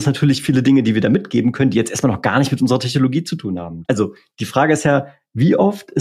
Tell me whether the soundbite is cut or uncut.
cut